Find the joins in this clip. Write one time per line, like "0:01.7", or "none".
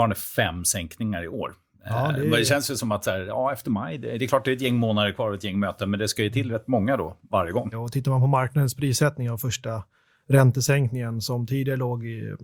0:07.7